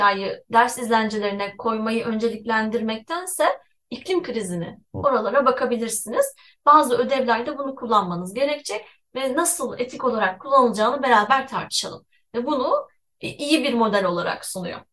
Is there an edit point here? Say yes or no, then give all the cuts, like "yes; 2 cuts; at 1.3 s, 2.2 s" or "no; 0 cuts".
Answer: yes; 1 cut; at 5.0 s